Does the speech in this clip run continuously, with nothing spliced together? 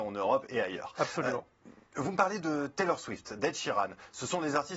yes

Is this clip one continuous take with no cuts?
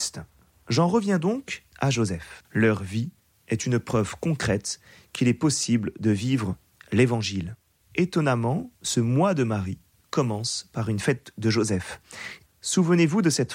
no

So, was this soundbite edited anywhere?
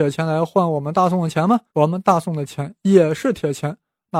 yes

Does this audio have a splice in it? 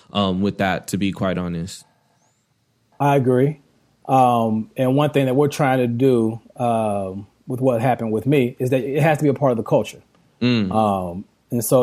no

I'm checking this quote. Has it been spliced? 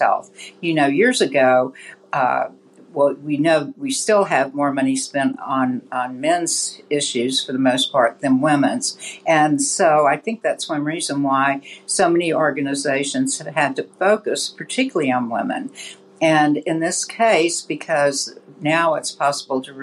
no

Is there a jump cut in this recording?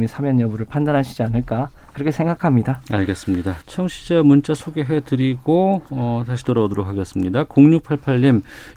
yes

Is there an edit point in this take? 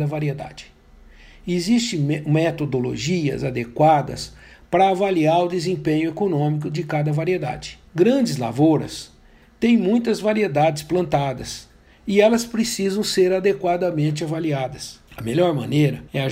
yes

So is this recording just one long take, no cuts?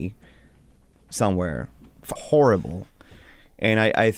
no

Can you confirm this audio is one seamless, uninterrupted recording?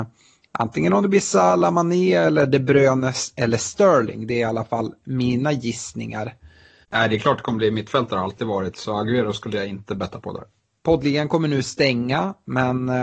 no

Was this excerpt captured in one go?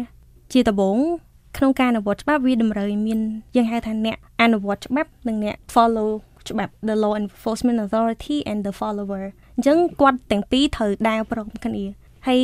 no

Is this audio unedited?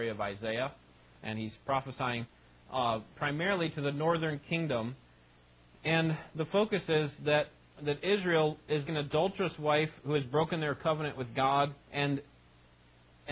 no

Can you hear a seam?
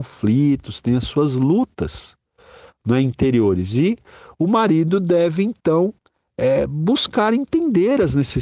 no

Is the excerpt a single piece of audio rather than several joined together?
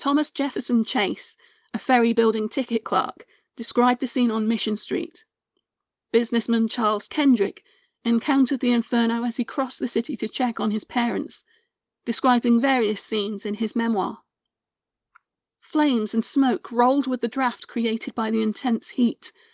no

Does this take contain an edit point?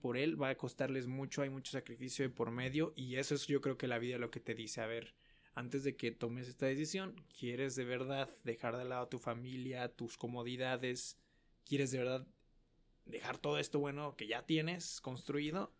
no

